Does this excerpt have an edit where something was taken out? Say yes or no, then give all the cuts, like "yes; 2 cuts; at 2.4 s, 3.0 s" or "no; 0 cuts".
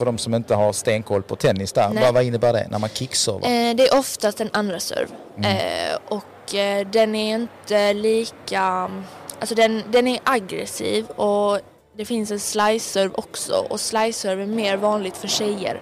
no; 0 cuts